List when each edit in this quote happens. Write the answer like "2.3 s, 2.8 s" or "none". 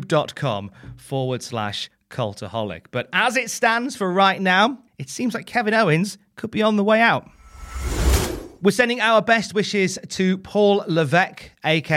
4.9 s